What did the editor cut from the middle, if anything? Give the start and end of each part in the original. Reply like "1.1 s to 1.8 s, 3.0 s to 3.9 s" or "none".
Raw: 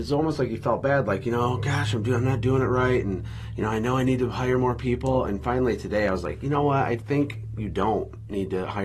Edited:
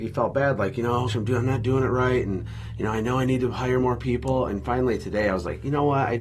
1.6 s to 1.9 s